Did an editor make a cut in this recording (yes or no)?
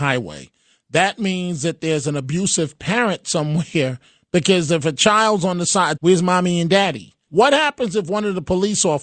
yes